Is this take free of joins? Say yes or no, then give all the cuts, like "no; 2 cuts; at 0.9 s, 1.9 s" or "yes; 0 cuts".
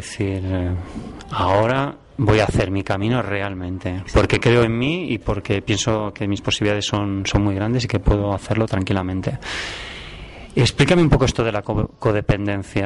yes; 0 cuts